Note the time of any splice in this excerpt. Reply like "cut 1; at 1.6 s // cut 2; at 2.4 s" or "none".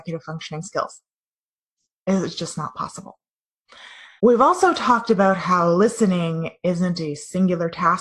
cut 1; at 4.2 s